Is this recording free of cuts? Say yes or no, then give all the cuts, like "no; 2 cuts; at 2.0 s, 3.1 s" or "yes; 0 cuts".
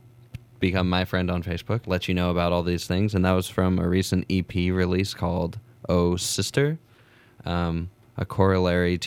no; 1 cut; at 1.8 s